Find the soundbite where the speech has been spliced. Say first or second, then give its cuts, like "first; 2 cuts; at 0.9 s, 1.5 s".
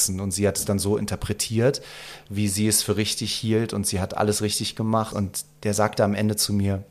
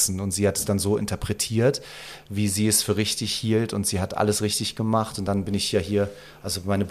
first; 1 cut; at 5.1 s